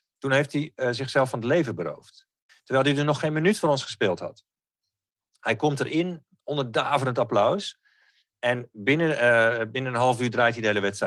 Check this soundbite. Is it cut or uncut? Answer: cut